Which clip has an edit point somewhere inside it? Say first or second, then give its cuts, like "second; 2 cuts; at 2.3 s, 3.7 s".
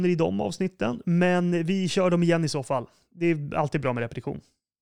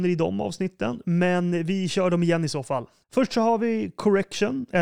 second; 1 cut; at 3.0 s